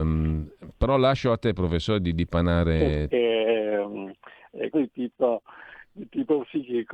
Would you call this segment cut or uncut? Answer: cut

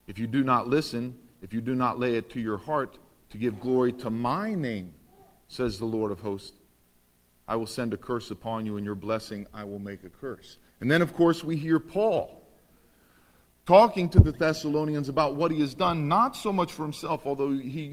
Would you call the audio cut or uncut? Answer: cut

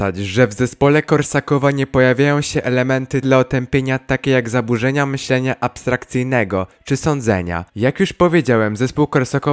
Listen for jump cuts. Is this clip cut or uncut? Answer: cut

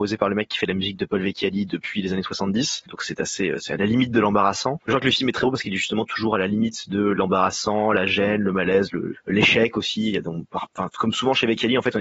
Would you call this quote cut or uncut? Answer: uncut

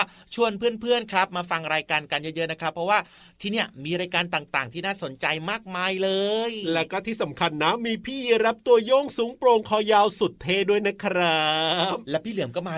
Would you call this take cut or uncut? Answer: uncut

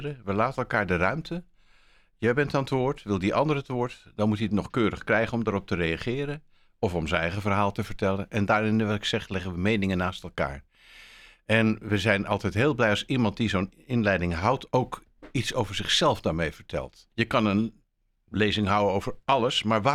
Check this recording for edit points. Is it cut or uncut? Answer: cut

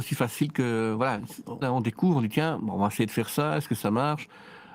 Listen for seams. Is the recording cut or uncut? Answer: cut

